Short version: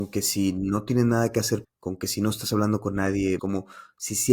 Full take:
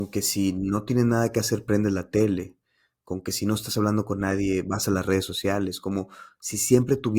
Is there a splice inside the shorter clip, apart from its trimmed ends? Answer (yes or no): yes